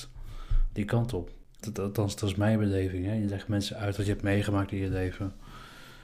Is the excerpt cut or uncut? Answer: cut